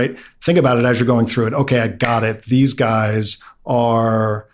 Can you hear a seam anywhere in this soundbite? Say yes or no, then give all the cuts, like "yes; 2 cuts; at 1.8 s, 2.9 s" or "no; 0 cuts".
no; 0 cuts